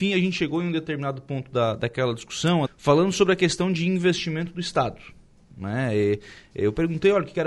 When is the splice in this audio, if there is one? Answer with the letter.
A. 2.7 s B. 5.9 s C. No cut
A